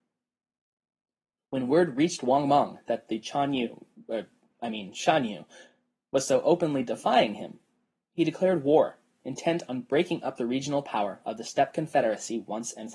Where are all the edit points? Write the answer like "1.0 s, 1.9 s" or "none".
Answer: none